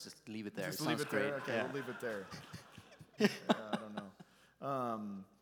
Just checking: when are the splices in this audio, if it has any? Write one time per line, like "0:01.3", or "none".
0:03.2